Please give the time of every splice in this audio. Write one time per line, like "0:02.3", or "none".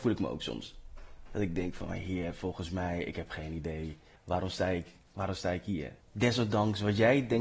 0:04.2
0:06.0